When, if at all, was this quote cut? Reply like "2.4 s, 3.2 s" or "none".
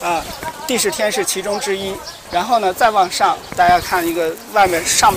2.3 s, 3.5 s